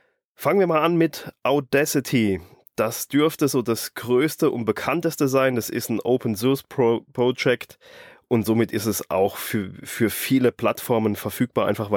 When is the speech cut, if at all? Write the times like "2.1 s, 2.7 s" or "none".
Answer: none